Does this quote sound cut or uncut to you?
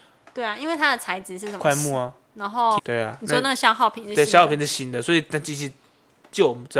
cut